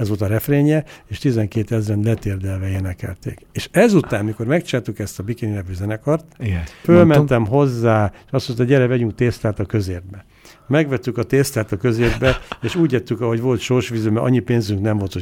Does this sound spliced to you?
yes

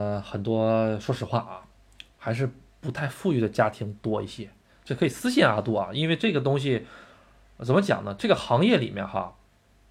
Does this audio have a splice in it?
no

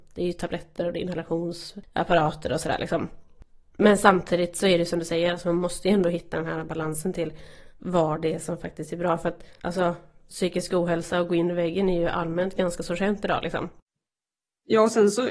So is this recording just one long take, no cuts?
yes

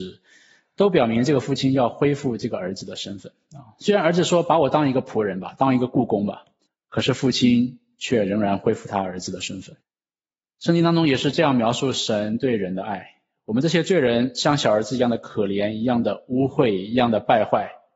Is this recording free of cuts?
yes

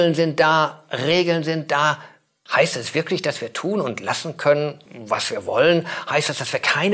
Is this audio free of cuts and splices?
no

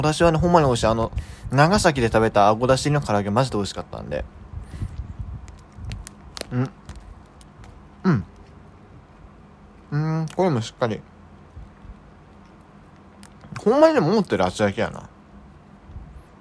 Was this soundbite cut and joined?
no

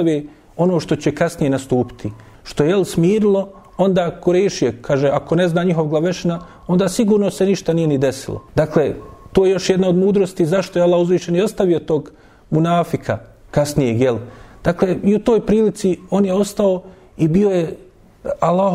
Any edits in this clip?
yes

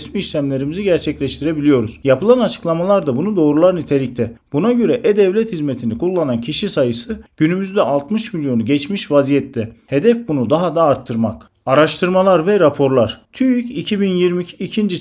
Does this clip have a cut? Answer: no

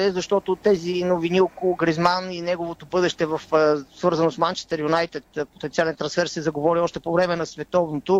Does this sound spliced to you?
no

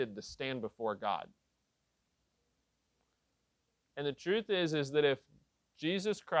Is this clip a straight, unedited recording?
yes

